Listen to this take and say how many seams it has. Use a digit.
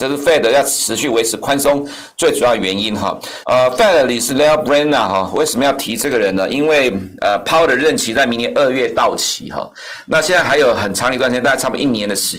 1